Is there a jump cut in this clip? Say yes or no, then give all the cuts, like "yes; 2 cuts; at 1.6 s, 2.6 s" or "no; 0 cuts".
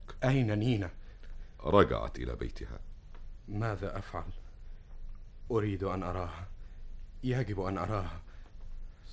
no; 0 cuts